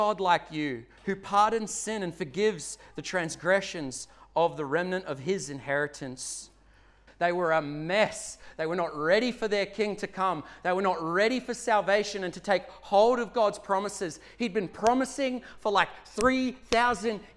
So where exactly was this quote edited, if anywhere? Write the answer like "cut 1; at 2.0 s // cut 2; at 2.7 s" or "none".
cut 1; at 7.1 s